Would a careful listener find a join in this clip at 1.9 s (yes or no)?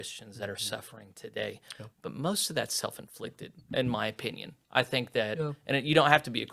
yes